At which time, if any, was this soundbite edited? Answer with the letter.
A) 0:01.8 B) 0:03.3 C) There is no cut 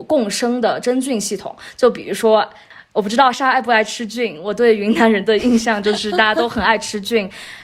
B